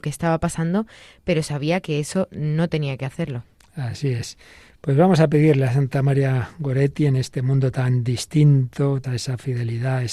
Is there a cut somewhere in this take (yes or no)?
yes